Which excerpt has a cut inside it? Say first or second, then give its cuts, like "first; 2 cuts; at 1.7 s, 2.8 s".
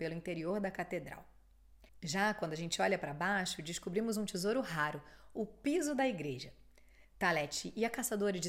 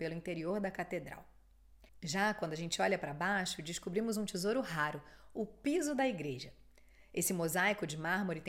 first; 1 cut; at 7.0 s